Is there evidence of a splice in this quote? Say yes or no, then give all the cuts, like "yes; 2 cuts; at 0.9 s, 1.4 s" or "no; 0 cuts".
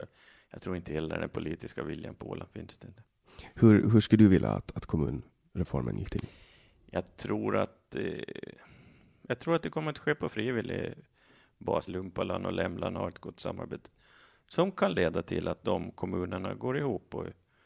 yes; 1 cut; at 11.9 s